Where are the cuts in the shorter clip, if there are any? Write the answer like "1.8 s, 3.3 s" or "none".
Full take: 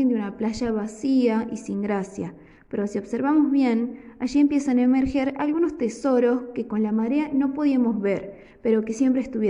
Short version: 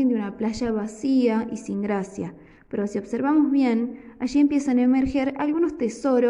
none